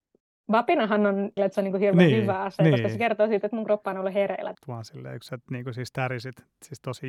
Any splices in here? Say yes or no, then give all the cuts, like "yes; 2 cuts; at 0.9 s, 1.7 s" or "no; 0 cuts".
yes; 2 cuts; at 1.4 s, 4.5 s